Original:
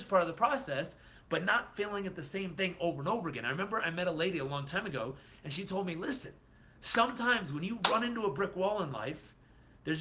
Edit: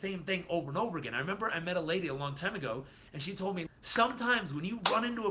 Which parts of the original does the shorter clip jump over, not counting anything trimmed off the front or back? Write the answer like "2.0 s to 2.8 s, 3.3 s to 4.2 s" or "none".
6.0 s to 6.7 s